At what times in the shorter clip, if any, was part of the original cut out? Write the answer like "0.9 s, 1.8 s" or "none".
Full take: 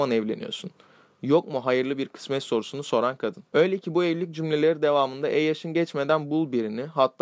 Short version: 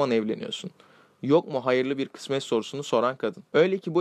none